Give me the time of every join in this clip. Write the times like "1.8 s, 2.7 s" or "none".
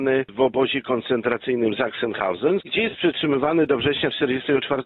2.6 s